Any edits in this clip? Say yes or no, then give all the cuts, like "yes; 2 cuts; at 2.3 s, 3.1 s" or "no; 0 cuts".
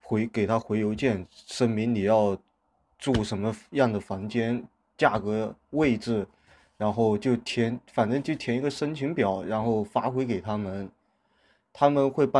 no; 0 cuts